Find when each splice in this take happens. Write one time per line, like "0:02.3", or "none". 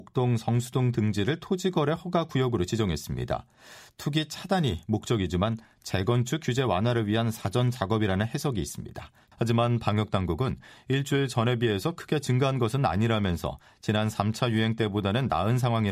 0:09.3